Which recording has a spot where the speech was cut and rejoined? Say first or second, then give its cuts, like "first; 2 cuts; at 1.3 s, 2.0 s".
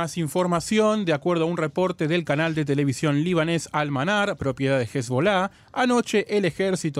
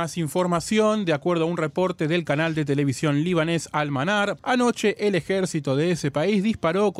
second; 1 cut; at 4.4 s